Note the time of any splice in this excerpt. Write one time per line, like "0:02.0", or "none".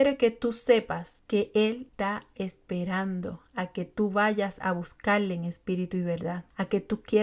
0:01.9